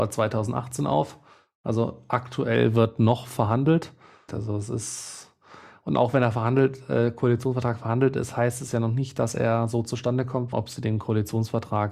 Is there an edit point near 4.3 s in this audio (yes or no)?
yes